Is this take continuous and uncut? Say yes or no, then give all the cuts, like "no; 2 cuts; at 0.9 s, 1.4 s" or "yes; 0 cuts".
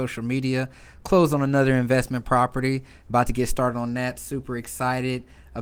yes; 0 cuts